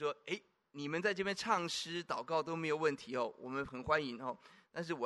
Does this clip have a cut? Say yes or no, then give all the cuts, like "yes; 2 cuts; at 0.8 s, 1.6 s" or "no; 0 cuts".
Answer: yes; 1 cut; at 3.7 s